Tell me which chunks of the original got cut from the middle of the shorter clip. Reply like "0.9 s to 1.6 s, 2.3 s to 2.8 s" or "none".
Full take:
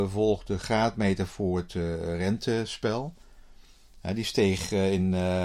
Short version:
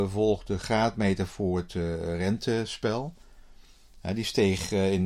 none